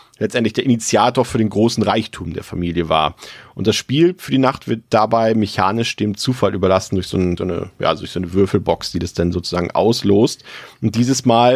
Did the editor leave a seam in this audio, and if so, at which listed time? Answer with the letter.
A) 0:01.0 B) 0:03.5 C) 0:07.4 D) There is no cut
C